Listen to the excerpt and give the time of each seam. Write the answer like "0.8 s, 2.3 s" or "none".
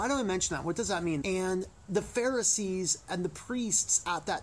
1.2 s